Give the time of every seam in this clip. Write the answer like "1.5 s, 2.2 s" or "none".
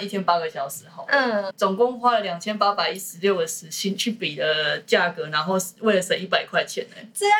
1.5 s